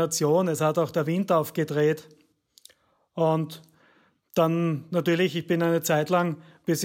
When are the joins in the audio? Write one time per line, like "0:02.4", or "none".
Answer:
none

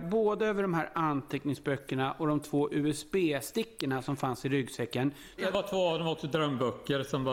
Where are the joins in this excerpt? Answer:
0:05.4

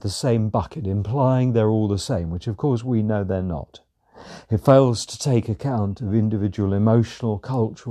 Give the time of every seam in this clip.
none

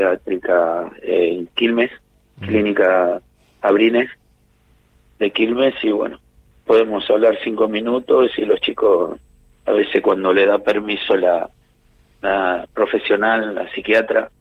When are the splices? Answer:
none

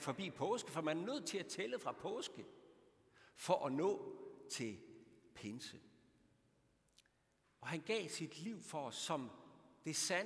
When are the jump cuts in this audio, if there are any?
0:07.4

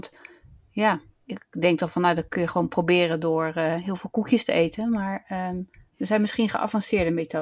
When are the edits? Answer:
none

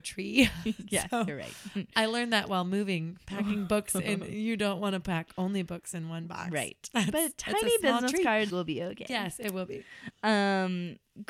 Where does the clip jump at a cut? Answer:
0:08.5

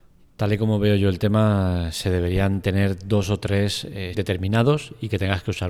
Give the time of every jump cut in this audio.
0:04.1

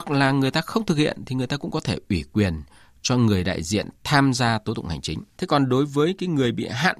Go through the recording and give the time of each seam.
0:05.3

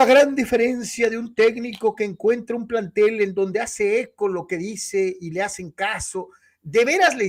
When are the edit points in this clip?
none

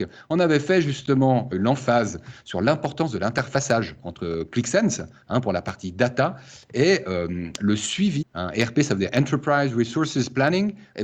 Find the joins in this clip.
0:01.5
0:08.2

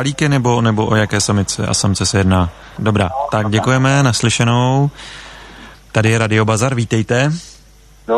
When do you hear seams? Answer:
0:02.8
0:05.7

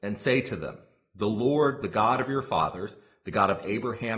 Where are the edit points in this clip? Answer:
none

